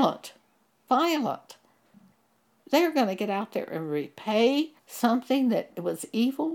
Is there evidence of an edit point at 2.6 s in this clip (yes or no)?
yes